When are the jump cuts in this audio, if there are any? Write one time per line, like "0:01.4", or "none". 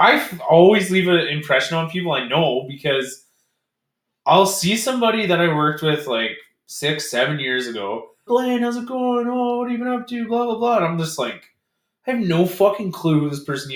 0:08.3